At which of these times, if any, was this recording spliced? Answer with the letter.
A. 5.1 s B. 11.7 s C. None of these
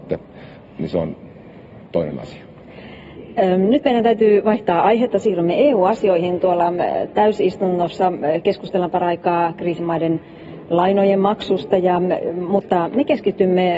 C